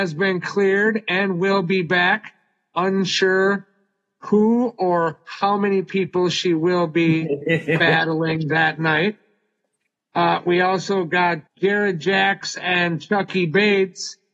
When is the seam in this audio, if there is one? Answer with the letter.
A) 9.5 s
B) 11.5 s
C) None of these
B